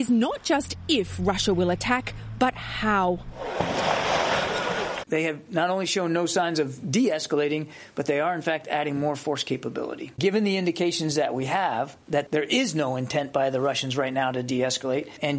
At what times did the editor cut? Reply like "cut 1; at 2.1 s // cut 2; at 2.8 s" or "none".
cut 1; at 5.0 s // cut 2; at 10.2 s